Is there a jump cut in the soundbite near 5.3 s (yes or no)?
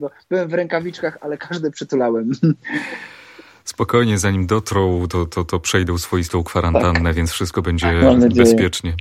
no